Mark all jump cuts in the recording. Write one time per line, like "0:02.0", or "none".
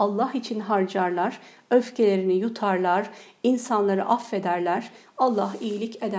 none